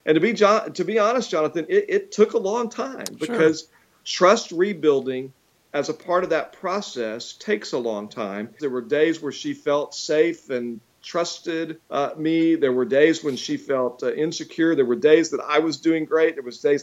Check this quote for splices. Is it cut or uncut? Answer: cut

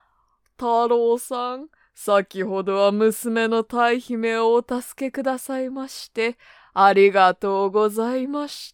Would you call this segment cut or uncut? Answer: uncut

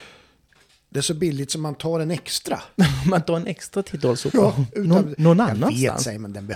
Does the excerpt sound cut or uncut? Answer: uncut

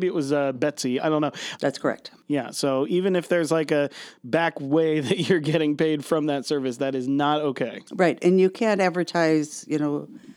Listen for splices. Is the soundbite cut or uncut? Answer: cut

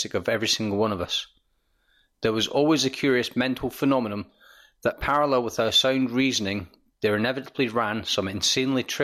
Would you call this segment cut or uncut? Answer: uncut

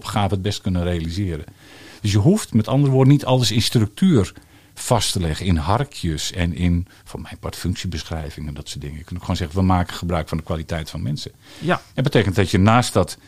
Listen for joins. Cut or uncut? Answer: uncut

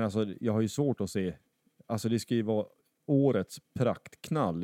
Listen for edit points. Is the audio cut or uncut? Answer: uncut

